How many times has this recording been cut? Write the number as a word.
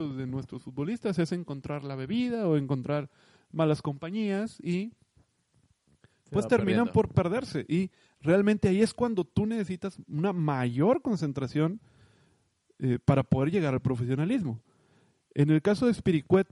zero